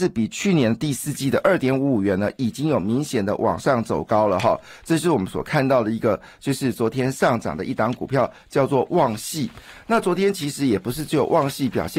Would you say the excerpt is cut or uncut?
uncut